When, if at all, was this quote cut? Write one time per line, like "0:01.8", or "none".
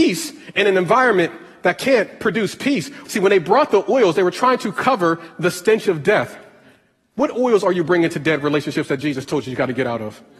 0:03.1